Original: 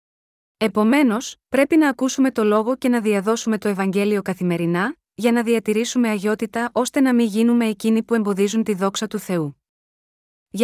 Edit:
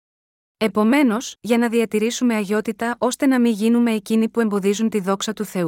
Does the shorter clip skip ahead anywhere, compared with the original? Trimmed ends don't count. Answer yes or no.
yes